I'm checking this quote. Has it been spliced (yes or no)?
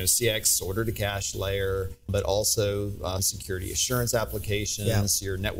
yes